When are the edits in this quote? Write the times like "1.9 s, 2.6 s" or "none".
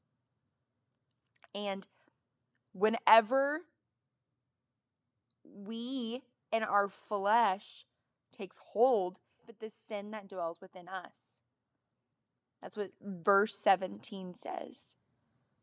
9.4 s